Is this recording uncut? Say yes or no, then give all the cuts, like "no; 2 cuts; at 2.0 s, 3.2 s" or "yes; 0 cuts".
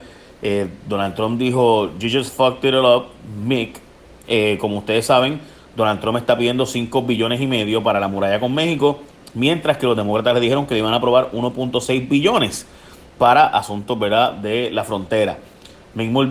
yes; 0 cuts